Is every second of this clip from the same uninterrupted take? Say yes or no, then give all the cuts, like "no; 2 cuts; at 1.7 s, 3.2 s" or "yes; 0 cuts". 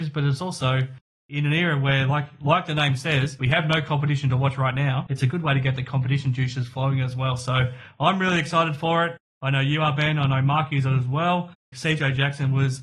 no; 1 cut; at 11.7 s